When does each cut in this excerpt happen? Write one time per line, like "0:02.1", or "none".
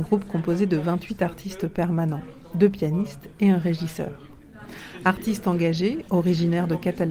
none